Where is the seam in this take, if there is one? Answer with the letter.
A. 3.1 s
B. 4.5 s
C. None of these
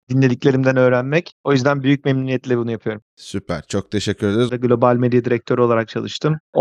B